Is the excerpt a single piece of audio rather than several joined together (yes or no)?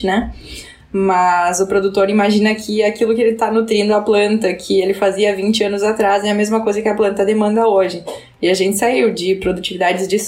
yes